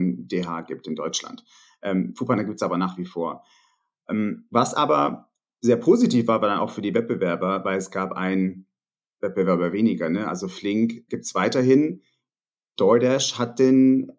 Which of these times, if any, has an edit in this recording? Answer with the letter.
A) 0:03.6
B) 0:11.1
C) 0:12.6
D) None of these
B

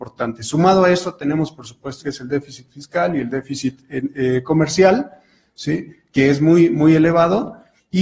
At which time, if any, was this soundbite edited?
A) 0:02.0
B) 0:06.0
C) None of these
A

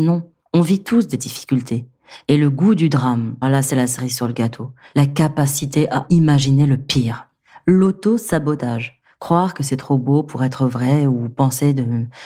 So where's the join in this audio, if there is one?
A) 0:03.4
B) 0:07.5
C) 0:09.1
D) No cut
A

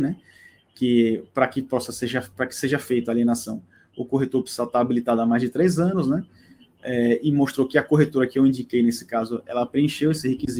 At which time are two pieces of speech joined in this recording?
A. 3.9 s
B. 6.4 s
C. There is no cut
C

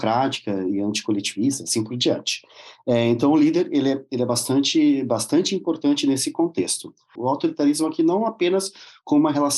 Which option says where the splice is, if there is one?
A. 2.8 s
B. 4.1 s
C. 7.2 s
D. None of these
C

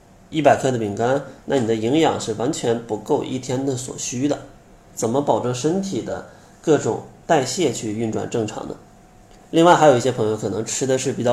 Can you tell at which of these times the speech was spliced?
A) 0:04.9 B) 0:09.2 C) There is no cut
A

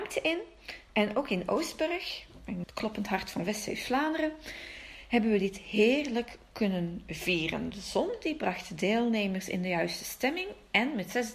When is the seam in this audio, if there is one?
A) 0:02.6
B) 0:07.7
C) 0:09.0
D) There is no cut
A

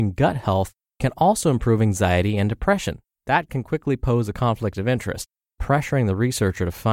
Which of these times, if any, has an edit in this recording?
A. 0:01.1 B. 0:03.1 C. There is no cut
B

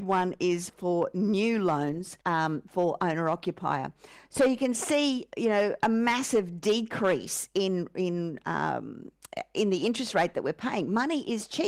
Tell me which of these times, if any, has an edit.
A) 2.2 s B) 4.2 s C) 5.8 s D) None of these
A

